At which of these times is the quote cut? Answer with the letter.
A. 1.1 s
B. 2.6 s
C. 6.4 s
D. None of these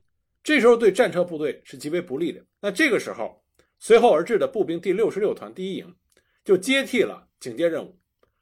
B